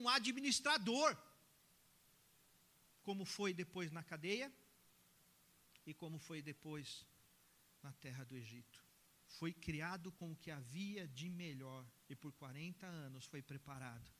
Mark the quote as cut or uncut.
cut